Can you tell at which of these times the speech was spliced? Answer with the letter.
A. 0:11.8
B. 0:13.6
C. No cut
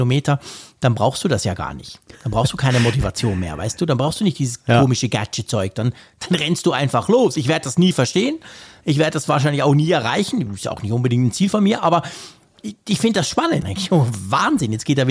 B